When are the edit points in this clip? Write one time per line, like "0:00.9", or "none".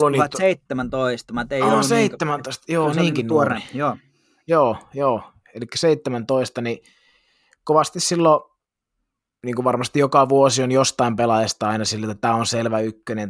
none